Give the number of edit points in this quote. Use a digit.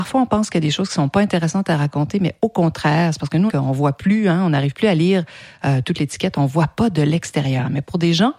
1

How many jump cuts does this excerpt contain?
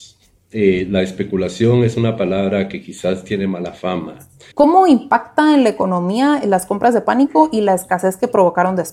1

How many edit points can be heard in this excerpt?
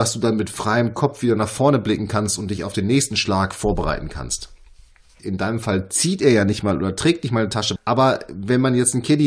2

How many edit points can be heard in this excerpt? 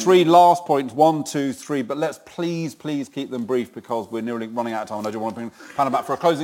0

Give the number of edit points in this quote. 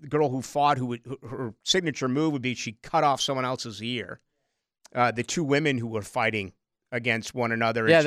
0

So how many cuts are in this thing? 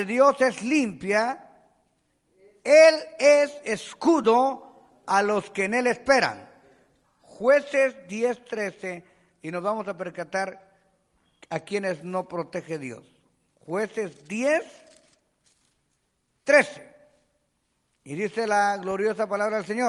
1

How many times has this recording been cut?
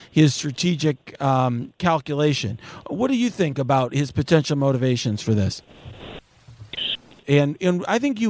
1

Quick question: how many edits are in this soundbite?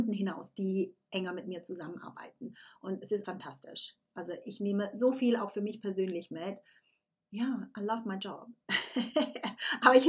1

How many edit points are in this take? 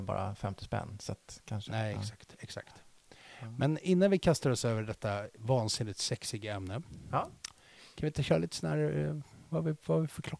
0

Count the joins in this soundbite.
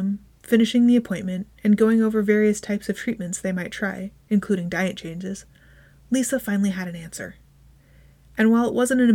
0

